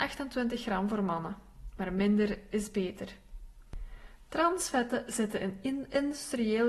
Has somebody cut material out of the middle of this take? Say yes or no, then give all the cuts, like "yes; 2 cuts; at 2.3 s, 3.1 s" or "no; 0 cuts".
no; 0 cuts